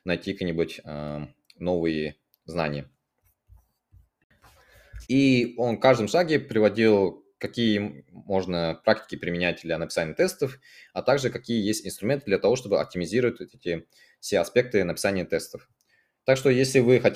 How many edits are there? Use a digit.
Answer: 1